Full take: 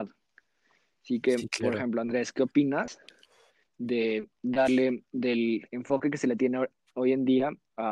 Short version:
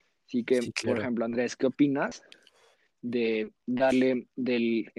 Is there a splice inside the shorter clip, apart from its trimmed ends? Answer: no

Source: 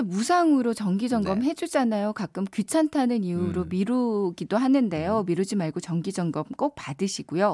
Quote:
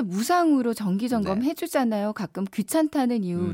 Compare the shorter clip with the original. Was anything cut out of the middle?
no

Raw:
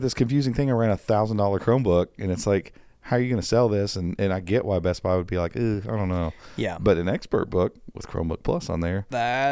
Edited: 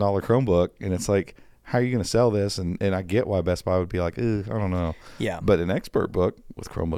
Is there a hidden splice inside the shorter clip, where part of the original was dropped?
no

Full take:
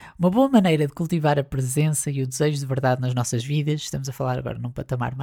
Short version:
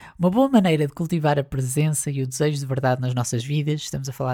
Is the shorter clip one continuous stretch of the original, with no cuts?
yes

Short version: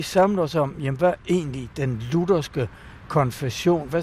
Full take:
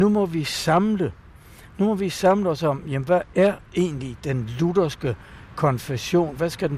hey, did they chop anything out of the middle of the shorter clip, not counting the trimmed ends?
yes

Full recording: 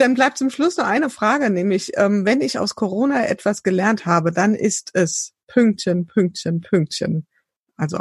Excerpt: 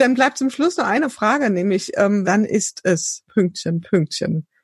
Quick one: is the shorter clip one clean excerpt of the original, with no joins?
no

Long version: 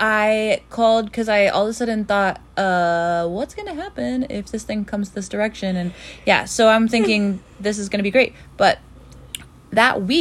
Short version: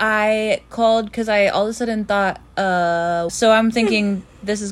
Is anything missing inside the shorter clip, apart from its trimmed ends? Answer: yes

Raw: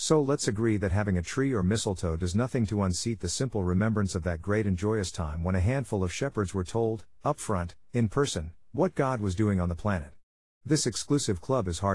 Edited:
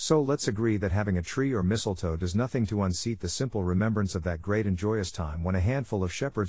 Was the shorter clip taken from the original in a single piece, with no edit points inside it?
yes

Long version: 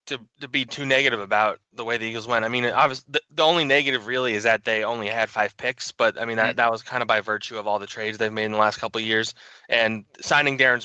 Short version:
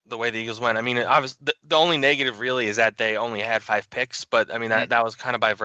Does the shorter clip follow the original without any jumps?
yes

